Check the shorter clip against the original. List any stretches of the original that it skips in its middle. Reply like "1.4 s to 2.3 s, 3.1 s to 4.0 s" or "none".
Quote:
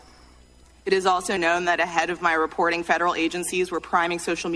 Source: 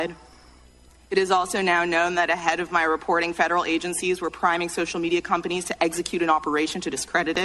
1.6 s to 1.9 s